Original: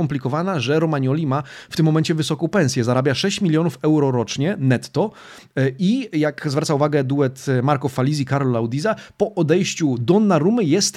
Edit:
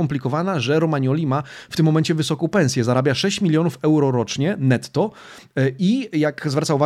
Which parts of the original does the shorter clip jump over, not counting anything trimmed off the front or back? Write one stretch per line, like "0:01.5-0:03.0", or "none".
none

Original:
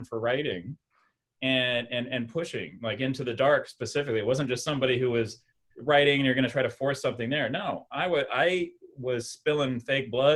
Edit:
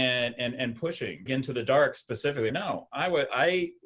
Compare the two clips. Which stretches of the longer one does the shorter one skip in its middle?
0:02.8-0:03.0
0:04.2-0:07.5

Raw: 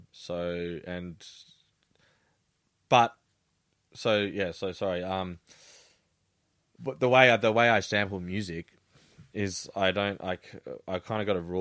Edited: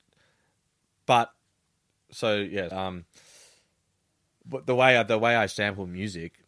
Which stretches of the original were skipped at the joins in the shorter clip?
0:04.5-0:05.0

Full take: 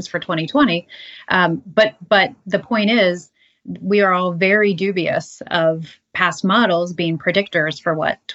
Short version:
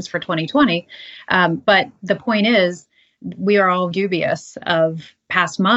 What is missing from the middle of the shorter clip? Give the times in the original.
0:01.6-0:02.1
0:04.3-0:04.8

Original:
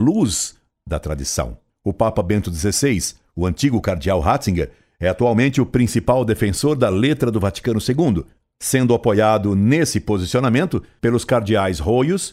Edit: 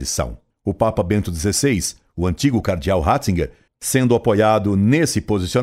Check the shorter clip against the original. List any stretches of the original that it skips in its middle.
0:04.9-0:08.5

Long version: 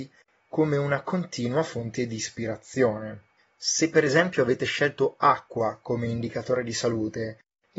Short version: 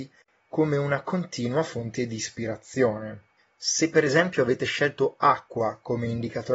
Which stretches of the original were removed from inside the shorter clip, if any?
none

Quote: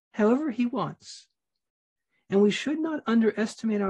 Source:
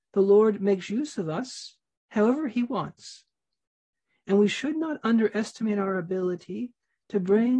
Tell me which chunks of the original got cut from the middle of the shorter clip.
none

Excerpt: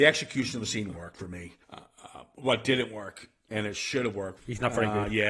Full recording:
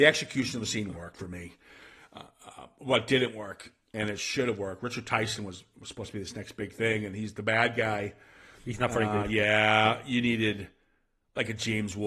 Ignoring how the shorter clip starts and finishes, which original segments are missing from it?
0:01.6-0:02.1
0:04.8-0:08.6

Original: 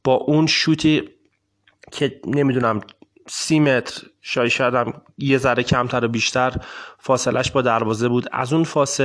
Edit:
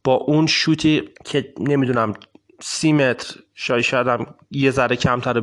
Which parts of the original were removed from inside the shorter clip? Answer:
0:01.2-0:01.8

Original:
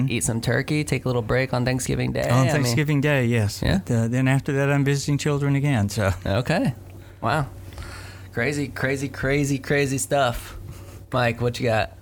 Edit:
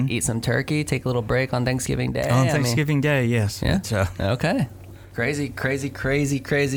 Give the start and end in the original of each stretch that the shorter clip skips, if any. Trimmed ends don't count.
0:03.8-0:05.9
0:07.2-0:08.3

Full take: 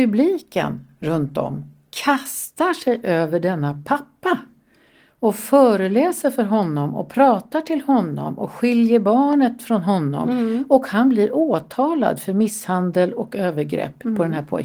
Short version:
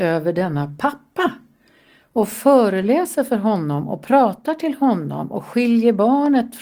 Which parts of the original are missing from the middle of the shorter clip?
none

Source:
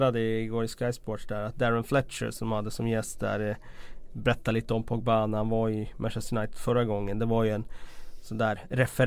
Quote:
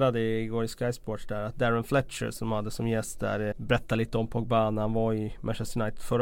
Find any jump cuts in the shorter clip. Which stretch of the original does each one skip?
0:03.5-0:04.1

